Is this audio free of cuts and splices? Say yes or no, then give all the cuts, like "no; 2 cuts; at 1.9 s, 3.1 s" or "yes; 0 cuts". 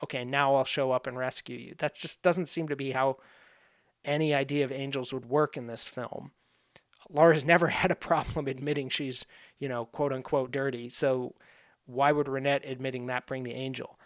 no; 1 cut; at 10.5 s